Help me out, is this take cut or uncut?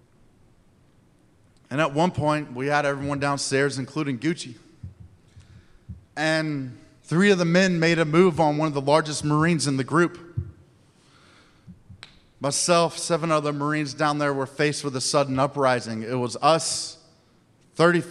uncut